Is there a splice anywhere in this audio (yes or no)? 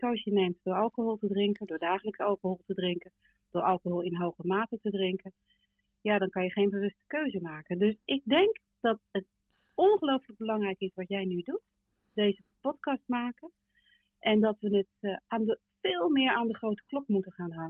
no